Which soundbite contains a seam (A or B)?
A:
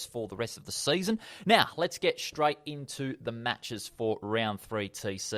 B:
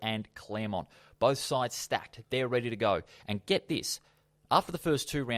B